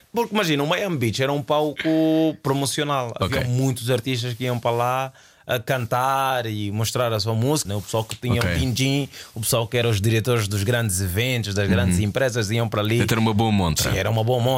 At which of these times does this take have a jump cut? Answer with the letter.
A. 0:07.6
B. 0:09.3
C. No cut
A